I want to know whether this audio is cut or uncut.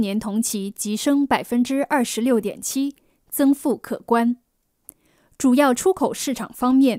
uncut